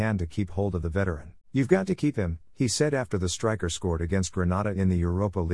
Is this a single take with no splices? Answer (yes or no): no